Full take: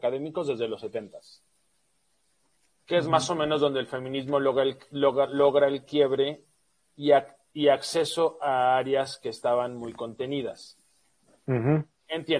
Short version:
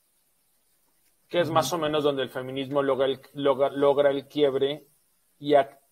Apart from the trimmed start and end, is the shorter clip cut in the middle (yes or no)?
no